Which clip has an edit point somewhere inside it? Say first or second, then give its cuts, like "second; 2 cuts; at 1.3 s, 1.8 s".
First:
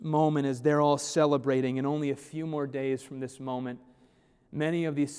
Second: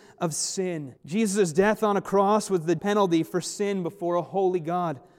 second; 2 cuts; at 1.0 s, 2.8 s